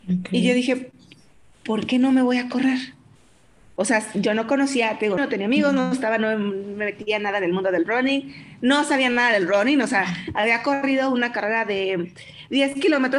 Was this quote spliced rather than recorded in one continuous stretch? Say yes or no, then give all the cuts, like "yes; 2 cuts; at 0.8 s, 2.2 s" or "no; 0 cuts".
yes; 1 cut; at 5.2 s